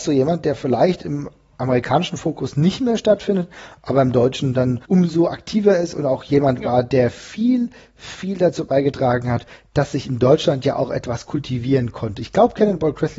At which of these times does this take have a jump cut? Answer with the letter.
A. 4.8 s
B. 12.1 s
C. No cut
A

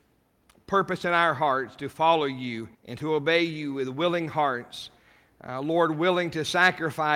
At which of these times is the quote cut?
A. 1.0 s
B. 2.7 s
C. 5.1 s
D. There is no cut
B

